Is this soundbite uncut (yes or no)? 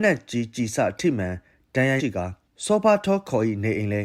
no